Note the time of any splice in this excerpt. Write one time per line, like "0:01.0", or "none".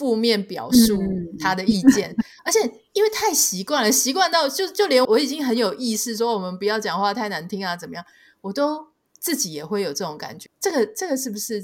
0:05.0
0:10.5